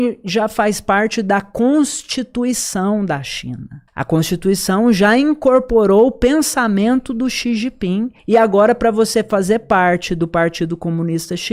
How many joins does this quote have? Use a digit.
2